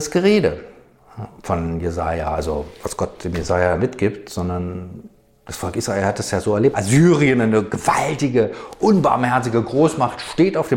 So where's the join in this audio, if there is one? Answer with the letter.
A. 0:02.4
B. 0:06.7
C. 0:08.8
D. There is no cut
B